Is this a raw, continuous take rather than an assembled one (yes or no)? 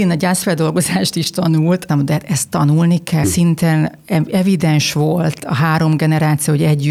no